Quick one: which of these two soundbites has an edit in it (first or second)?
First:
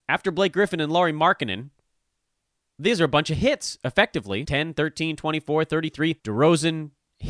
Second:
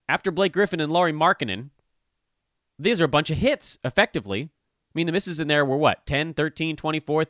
first